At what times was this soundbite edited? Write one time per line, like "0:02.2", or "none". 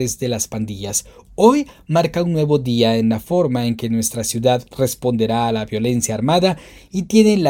none